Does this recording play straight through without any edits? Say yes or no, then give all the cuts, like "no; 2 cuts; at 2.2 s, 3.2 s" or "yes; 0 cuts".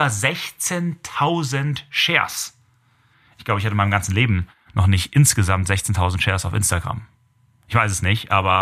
yes; 0 cuts